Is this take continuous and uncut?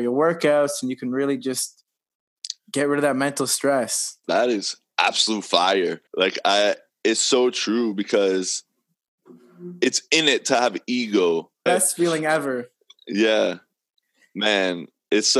no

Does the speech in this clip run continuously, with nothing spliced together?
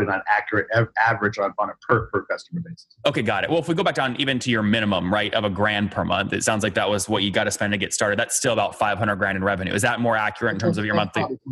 yes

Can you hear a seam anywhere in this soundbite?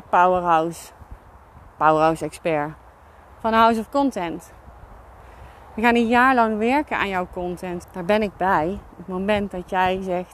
yes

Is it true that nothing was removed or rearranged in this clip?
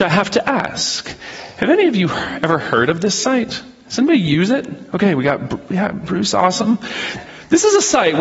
yes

